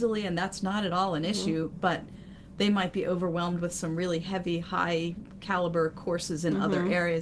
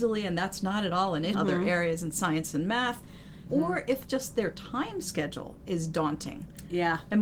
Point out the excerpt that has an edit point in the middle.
second; 2 cuts; at 1.3 s, 3.5 s

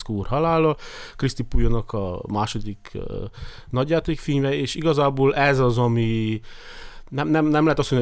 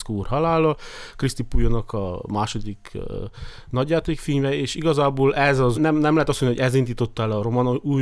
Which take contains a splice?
second; 1 cut; at 5.7 s

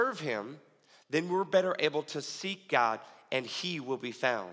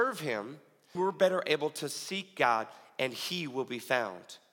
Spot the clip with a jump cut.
second; 1 cut; at 1.0 s

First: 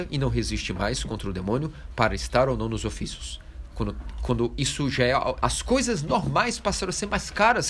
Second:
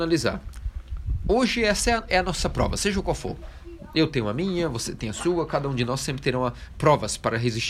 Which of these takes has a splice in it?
first; 1 cut; at 5.4 s

